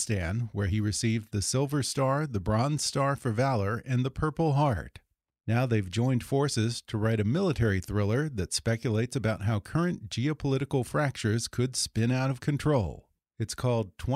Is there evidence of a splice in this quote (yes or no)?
no